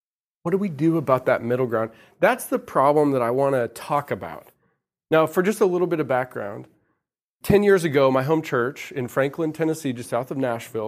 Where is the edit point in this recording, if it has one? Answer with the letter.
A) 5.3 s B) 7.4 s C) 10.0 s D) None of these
B